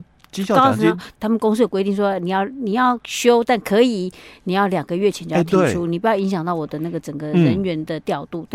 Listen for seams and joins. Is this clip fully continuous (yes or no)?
no